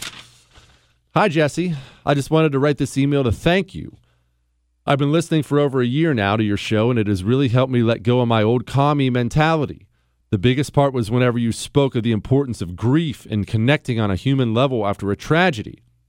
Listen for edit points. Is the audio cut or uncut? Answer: uncut